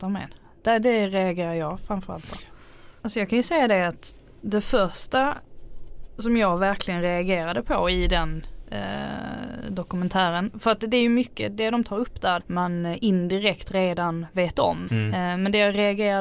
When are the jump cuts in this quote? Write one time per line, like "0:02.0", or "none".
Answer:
0:03.0
0:12.4
0:14.9